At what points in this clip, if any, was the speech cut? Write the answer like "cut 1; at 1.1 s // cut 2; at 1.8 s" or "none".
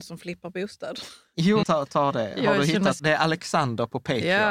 cut 1; at 1.6 s // cut 2; at 3.0 s